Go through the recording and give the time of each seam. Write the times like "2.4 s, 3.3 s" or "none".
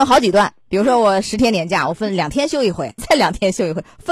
3.0 s